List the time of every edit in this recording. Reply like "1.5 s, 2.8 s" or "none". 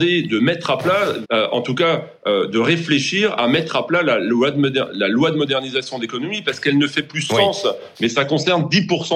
1.2 s, 7.9 s

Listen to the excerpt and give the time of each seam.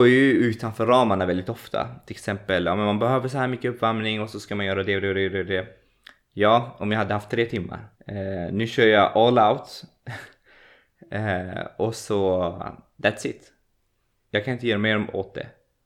8.0 s

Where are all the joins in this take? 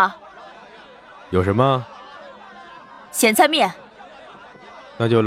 none

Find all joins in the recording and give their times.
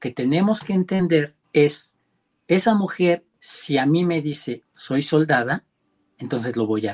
1.4 s, 3.3 s, 4.7 s

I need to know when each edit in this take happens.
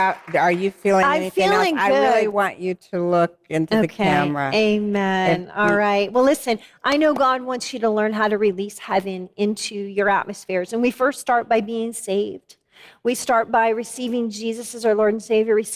none

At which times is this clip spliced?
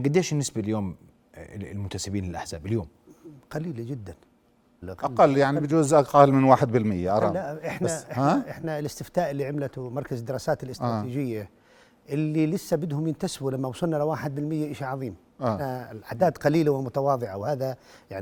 4.8 s

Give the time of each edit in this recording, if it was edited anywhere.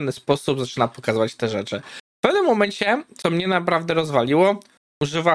2.1 s

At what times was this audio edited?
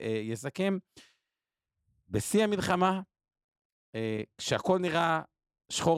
none

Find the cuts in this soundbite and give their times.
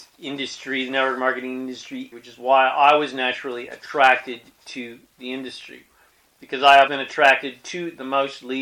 2.1 s, 6.9 s

